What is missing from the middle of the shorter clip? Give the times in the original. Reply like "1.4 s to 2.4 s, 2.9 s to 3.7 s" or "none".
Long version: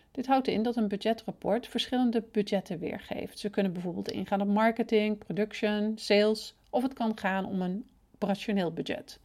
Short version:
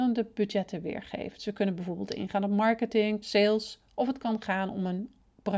5.2 s to 6.0 s